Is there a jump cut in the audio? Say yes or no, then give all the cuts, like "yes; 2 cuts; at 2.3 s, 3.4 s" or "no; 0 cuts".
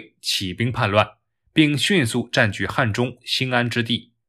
no; 0 cuts